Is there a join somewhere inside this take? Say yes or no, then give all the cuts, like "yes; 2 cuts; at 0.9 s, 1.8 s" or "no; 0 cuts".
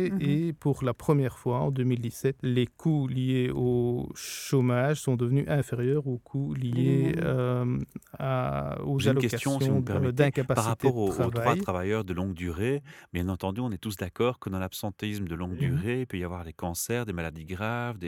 no; 0 cuts